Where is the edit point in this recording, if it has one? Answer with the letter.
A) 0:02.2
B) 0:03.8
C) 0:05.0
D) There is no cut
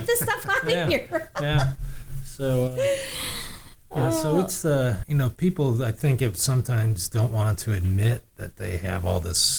C